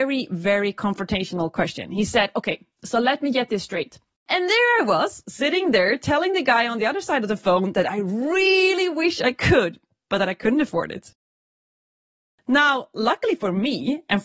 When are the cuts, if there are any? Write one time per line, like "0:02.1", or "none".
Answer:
0:04.2